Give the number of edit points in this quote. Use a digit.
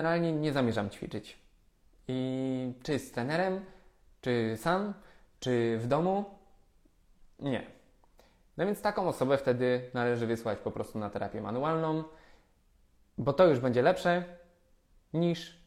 0